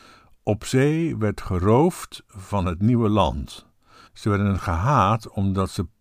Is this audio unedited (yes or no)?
no